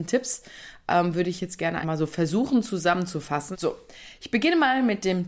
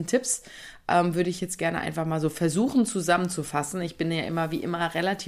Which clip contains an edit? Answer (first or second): first